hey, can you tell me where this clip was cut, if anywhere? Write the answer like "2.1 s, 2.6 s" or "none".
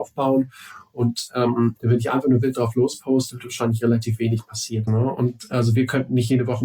1.8 s, 4.9 s